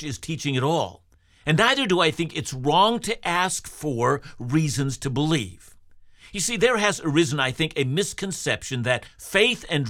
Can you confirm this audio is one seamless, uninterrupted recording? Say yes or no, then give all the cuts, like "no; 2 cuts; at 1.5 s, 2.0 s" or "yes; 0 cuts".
yes; 0 cuts